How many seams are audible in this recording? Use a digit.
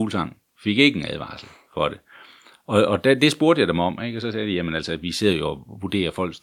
0